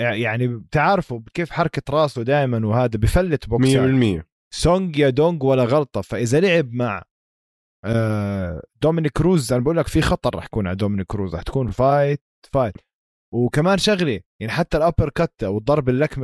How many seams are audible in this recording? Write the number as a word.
zero